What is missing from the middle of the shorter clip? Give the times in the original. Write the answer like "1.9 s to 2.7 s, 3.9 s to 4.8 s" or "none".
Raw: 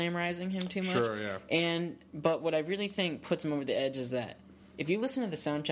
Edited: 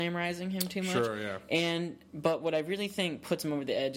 none

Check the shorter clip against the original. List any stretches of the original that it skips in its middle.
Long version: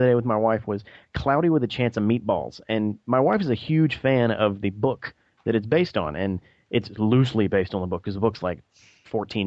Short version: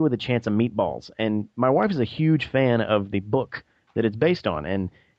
none

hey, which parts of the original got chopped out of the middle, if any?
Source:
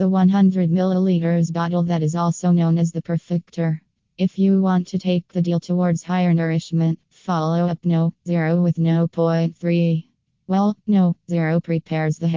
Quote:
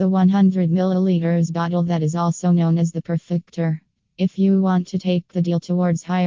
none

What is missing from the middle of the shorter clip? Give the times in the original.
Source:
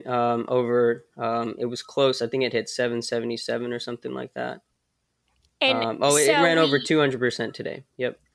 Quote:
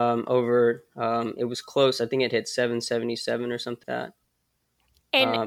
4.0 s to 4.3 s

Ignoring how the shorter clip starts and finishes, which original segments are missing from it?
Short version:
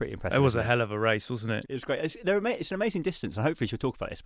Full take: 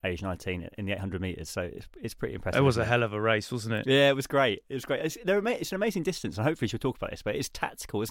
3.8 s to 4.6 s

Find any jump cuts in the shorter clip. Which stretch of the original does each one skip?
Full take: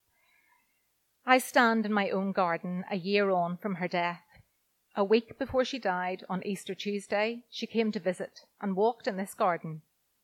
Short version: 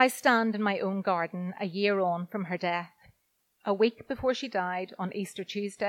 none

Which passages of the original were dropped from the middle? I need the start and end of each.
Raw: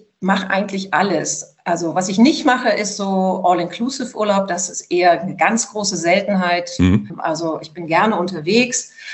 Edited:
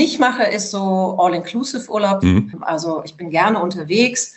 4.5 s to 6.8 s

